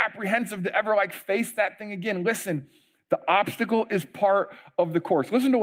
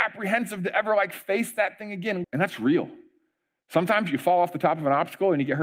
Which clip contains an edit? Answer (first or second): second